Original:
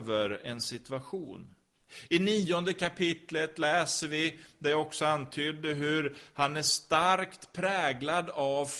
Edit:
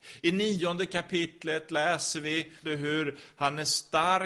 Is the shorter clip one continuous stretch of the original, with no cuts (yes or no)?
no